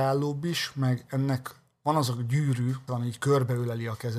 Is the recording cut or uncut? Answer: cut